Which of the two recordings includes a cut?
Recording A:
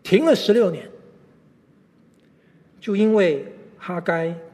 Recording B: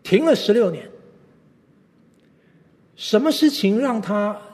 A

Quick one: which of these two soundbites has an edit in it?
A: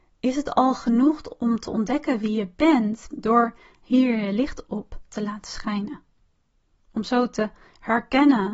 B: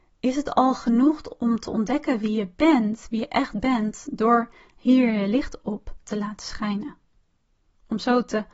A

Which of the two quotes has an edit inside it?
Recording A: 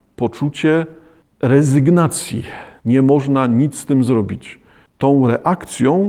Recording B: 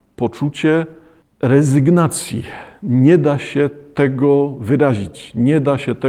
A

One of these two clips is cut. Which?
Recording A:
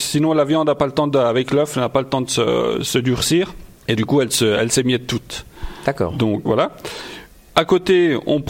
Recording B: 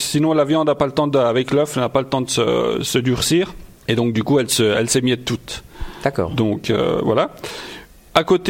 A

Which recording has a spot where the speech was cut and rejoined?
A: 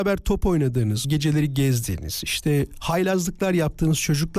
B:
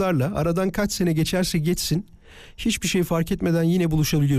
A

